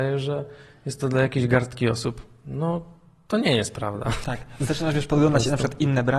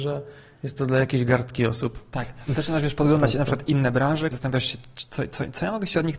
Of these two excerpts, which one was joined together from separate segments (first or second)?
second